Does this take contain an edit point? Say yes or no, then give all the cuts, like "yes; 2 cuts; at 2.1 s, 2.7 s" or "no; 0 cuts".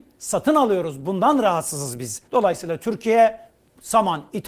yes; 1 cut; at 2.3 s